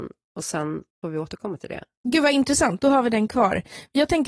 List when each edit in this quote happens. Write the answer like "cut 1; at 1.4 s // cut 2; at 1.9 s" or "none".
cut 1; at 0.9 s